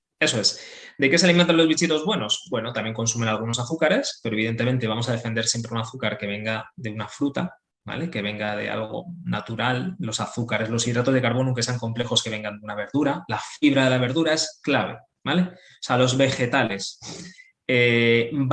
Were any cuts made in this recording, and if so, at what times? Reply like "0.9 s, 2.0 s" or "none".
none